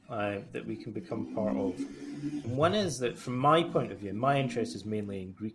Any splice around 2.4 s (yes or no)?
yes